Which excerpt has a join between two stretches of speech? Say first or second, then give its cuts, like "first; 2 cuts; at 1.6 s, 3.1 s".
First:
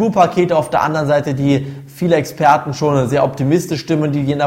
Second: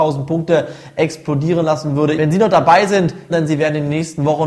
second; 2 cuts; at 2.2 s, 3.3 s